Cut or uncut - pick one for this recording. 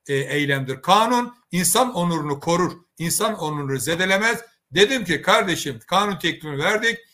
uncut